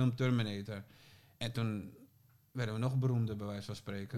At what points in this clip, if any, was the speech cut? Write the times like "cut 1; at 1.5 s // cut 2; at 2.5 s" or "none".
none